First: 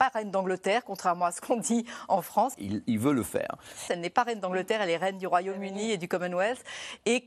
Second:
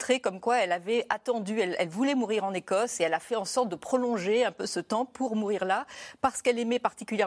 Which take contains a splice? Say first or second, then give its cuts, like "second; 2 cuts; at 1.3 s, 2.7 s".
first; 2 cuts; at 2.5 s, 3.9 s